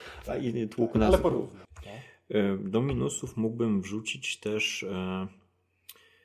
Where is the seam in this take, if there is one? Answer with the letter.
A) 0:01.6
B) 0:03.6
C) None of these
A